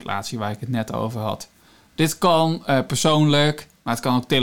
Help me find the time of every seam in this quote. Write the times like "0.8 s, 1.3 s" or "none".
none